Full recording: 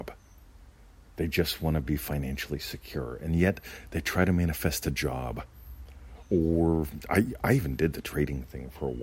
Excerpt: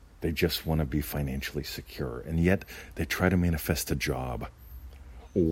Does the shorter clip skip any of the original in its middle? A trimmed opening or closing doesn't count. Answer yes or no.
no